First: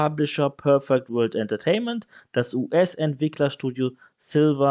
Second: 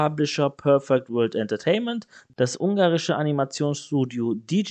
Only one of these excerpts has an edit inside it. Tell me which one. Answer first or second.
second